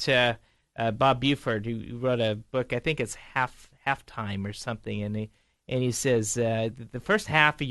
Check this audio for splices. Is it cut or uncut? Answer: uncut